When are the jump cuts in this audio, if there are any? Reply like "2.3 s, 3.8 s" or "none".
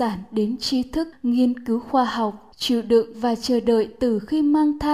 1.1 s, 2.5 s